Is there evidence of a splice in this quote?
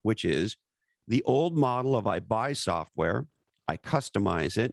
no; 0 cuts

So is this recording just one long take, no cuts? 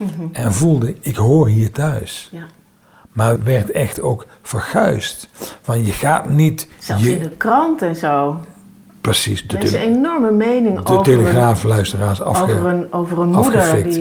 no; 1 cut; at 3.4 s

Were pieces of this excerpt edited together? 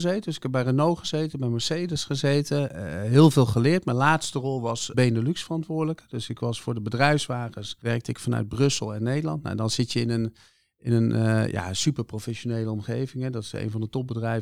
yes; 1 cut; at 4.9 s

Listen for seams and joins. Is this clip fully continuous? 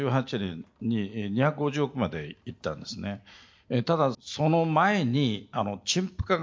no; 1 cut; at 4.1 s

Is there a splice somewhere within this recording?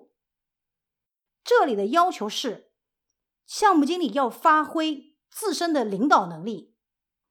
yes; 1 cut; at 1.3 s

